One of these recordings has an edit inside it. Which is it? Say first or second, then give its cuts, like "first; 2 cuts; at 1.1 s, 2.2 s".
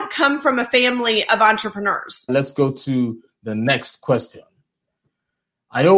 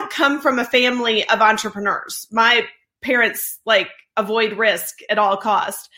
first; 1 cut; at 2.3 s